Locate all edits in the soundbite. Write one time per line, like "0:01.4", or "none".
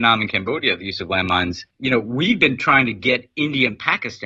0:01.7